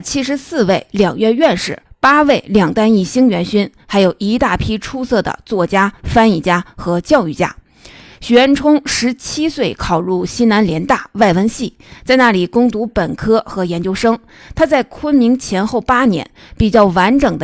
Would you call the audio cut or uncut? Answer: uncut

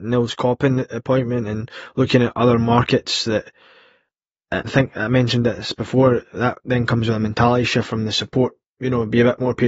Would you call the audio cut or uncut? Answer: cut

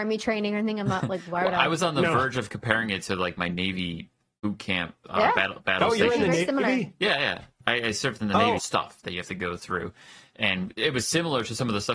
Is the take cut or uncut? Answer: cut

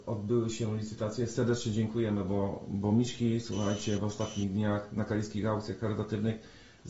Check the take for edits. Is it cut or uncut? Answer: uncut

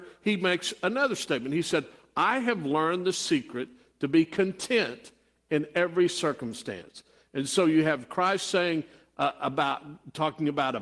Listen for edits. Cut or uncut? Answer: uncut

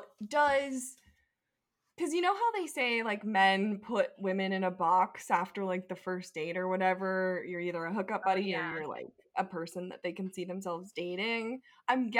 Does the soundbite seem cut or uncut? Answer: uncut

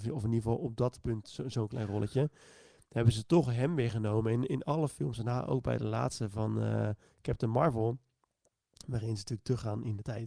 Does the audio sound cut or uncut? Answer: uncut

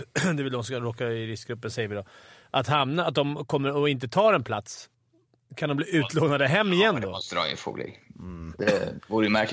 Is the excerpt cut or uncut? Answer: uncut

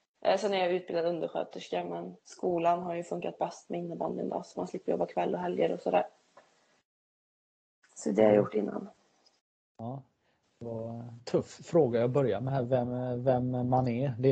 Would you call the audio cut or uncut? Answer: uncut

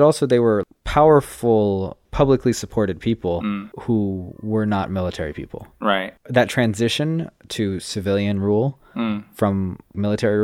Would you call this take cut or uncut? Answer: uncut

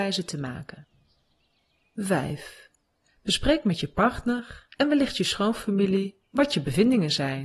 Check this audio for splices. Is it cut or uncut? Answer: uncut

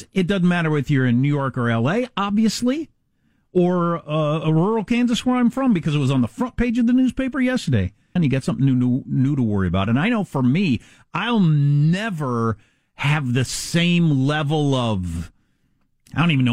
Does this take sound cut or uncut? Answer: cut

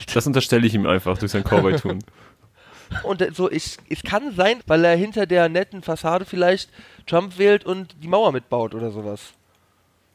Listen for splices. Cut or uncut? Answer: cut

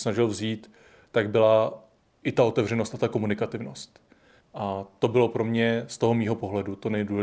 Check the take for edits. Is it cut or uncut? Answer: cut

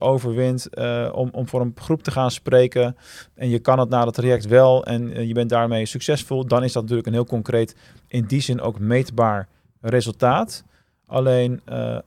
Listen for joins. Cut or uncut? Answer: uncut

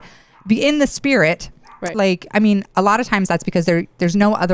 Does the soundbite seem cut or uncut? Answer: cut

